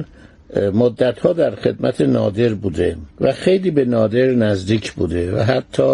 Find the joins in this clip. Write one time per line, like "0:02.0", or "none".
0:03.1